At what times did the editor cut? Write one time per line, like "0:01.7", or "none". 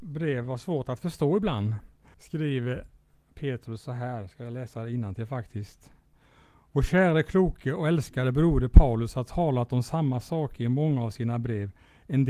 0:02.1